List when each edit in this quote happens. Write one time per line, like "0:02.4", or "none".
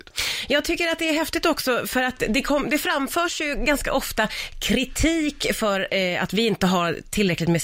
none